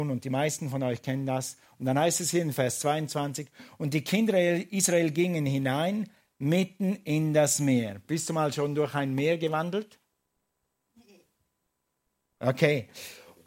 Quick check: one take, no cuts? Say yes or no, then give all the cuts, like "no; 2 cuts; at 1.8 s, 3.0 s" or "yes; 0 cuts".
yes; 0 cuts